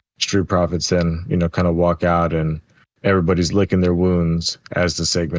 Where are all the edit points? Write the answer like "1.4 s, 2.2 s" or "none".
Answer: none

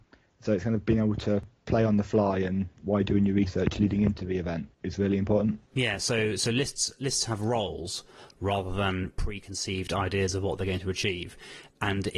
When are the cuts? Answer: none

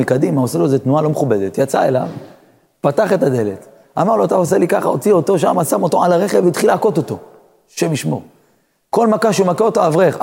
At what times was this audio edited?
none

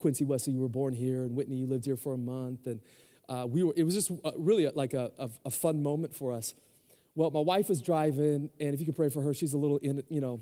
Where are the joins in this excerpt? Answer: none

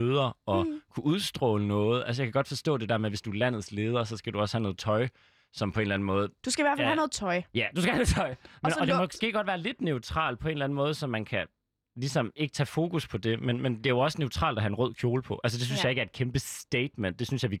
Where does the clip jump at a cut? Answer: none

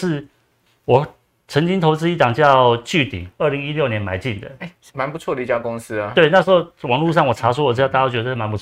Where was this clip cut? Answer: 4.9 s

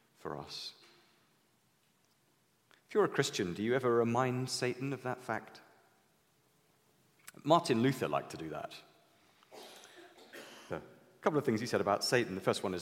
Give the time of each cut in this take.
10.7 s

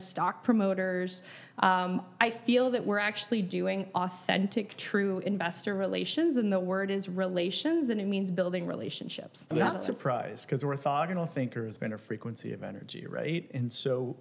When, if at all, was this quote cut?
9.5 s, 11.8 s

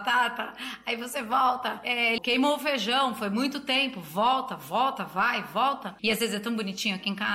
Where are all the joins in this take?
2.2 s, 6.0 s

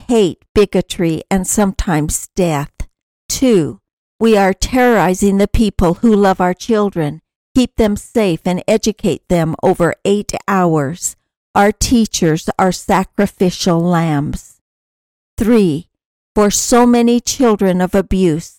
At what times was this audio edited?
none

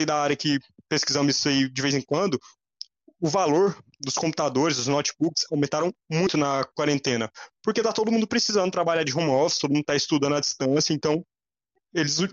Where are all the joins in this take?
none

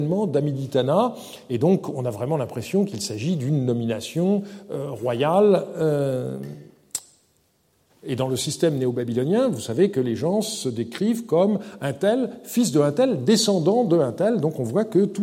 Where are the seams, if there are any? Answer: 7.9 s

